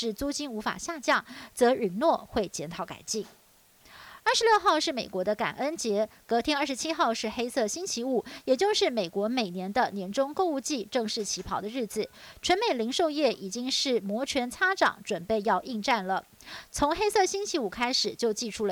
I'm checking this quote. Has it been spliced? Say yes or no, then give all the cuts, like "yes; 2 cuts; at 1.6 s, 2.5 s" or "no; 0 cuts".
no; 0 cuts